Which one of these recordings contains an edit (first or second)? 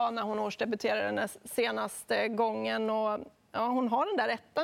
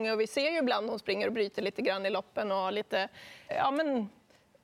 second